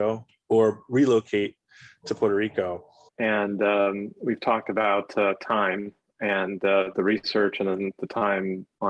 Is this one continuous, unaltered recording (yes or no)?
no